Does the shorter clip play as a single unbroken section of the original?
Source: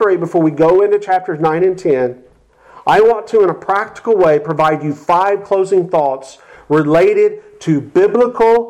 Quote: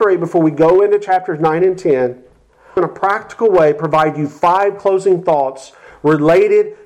no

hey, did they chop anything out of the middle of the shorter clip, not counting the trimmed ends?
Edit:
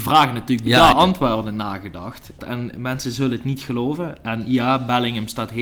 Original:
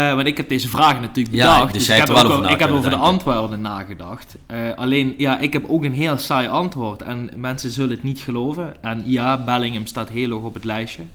yes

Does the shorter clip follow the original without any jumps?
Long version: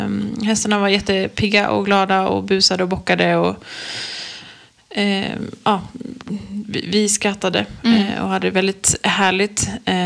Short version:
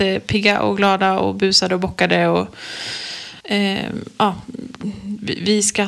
no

